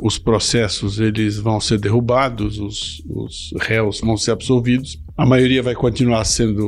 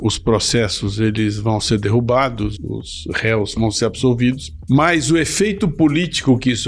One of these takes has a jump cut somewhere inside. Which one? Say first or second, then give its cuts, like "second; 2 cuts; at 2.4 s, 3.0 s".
second; 2 cuts; at 2.6 s, 4.7 s